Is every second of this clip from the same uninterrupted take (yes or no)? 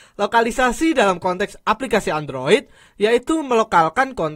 yes